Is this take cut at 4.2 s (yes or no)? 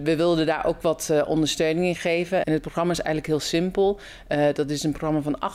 no